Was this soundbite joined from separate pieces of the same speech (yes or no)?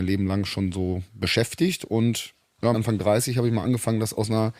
yes